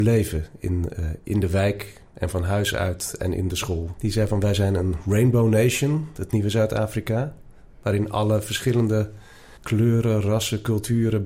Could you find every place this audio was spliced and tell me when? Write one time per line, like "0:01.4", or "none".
0:04.0
0:09.6